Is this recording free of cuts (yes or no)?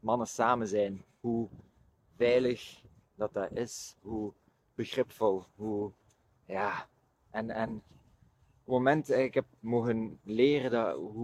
yes